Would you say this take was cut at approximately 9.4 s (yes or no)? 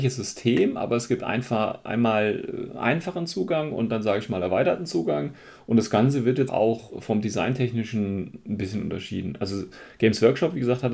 no